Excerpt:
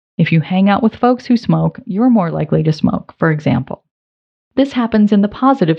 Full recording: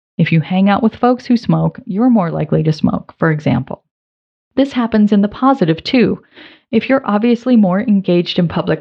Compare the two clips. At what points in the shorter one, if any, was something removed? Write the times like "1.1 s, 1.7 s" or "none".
none